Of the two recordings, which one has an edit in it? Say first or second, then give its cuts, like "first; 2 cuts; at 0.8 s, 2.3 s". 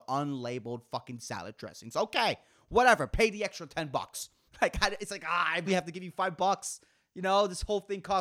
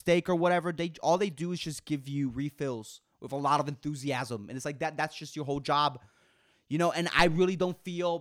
first; 2 cuts; at 4.5 s, 5.7 s